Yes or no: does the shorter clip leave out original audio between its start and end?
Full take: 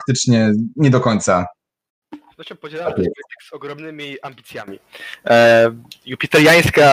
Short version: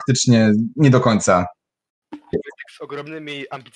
yes